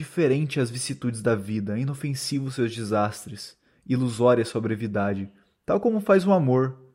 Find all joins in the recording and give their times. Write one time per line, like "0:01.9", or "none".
none